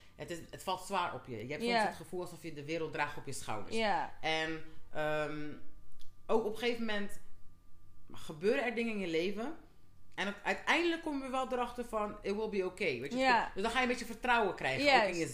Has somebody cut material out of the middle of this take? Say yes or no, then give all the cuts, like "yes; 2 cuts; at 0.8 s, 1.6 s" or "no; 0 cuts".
no; 0 cuts